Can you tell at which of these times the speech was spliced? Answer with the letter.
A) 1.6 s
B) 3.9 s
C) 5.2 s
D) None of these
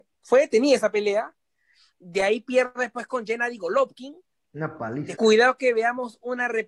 C